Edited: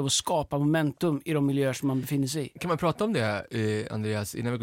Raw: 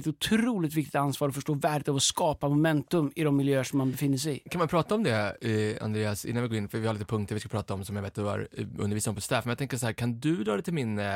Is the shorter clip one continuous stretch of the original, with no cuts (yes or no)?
yes